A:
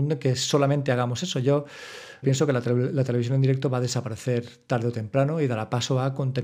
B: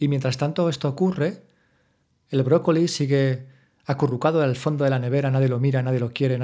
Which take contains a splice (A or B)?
A